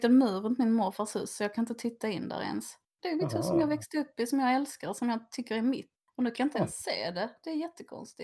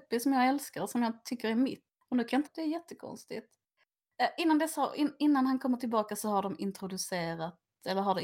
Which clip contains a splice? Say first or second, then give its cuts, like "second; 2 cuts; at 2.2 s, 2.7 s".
second; 1 cut; at 2.5 s